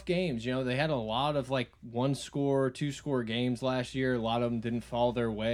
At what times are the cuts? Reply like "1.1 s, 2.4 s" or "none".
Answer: none